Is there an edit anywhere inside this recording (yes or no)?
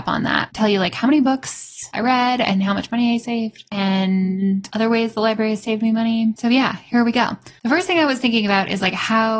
no